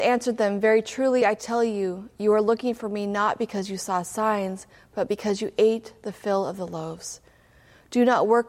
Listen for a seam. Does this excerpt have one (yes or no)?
no